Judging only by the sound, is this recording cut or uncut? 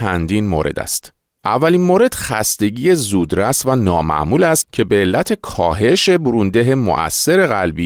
uncut